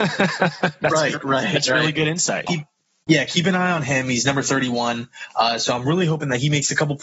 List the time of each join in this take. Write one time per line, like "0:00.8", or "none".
0:02.5